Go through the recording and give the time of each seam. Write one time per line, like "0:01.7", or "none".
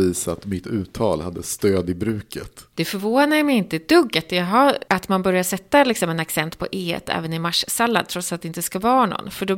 none

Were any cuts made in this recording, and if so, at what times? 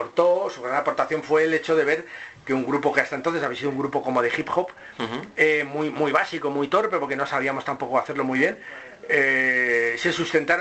none

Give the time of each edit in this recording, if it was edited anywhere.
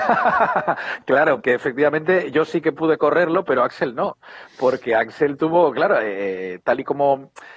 0:01.4

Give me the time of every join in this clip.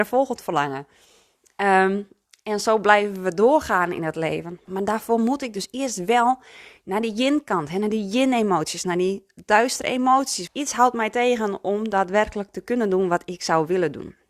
0:04.7
0:10.5

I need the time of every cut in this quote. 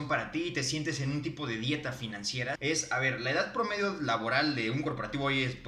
0:02.5

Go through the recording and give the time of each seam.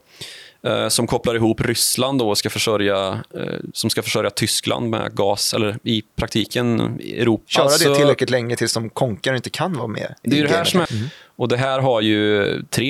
0:07.5
0:10.9

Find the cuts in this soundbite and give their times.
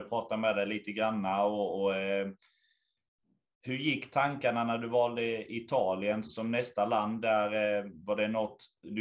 0:06.2

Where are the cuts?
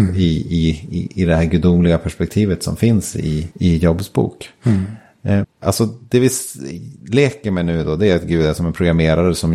0:03.5
0:05.4

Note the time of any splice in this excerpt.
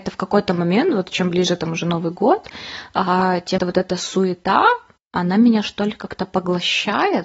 0:03.6

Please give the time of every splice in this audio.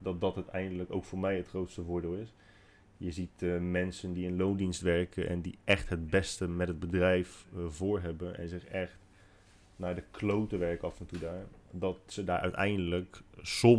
none

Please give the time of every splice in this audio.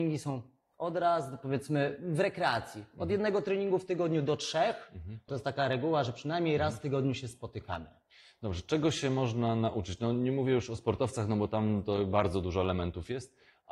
0:05.3

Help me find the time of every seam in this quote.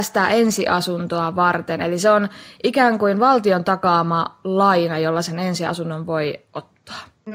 none

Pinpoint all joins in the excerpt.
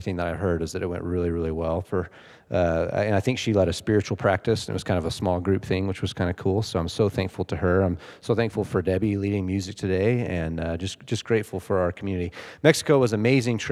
none

